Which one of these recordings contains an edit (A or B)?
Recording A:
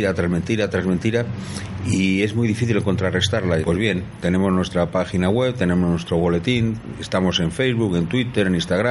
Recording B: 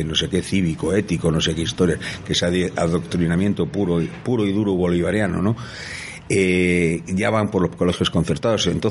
A